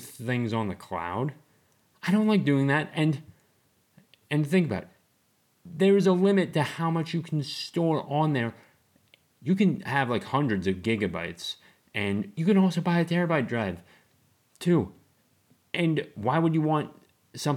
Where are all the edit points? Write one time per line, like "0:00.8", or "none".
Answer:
0:09.2